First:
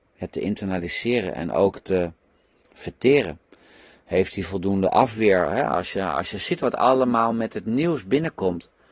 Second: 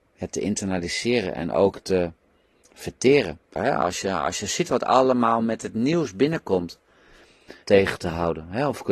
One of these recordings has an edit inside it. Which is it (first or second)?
second